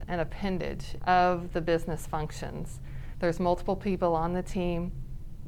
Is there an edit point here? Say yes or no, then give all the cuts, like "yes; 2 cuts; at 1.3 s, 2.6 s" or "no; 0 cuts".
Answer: yes; 2 cuts; at 1.0 s, 3.1 s